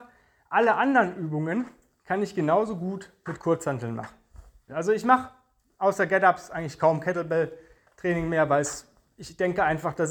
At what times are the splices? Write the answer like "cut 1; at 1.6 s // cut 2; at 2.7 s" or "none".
cut 1; at 4.7 s